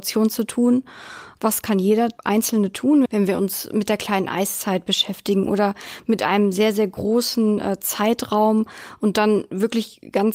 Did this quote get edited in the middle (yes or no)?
yes